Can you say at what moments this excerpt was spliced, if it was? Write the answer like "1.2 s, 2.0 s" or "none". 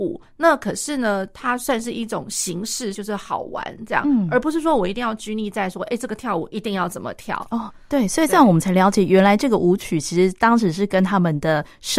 2.9 s